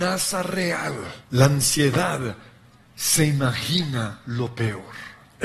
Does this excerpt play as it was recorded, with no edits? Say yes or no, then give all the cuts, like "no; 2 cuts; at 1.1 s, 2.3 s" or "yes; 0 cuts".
no; 1 cut; at 1.2 s